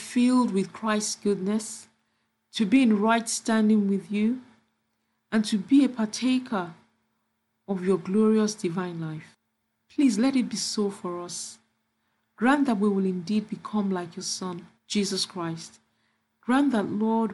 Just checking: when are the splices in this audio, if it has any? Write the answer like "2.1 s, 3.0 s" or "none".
14.8 s